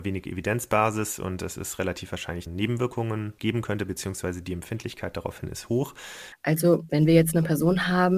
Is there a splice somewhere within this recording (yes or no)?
yes